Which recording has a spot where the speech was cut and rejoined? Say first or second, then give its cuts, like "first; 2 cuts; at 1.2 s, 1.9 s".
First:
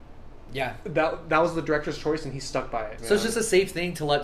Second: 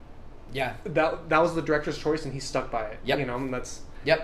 first; 1 cut; at 3.0 s